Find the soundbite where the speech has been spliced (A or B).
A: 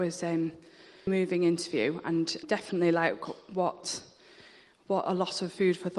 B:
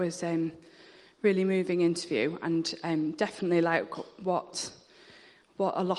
A